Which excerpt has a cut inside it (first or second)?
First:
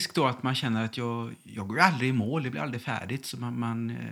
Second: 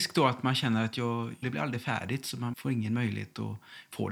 second